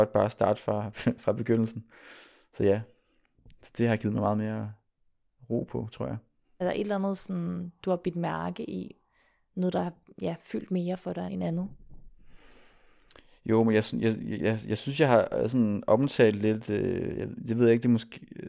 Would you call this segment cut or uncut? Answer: cut